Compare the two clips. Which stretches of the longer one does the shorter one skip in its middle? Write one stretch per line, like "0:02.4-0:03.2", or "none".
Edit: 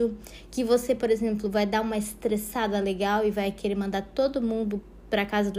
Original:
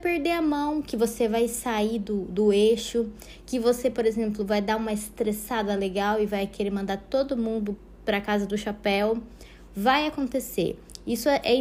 none